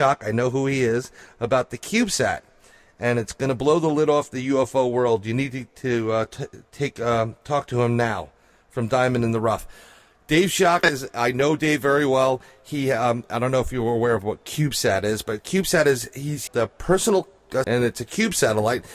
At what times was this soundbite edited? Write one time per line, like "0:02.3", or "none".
0:16.5
0:17.6